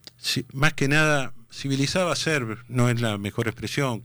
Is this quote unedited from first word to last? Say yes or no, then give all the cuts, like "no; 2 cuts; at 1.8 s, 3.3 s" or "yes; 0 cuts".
yes; 0 cuts